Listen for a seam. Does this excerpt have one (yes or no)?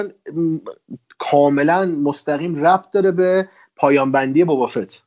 no